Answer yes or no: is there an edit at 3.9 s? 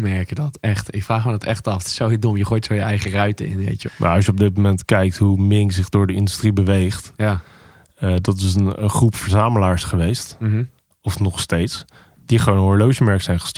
yes